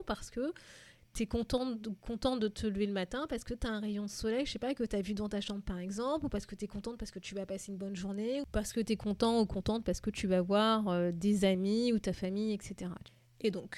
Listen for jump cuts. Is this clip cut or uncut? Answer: uncut